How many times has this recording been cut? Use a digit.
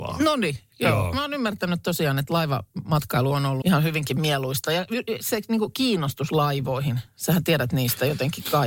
1